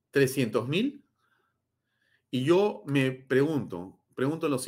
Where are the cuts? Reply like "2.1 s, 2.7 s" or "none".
none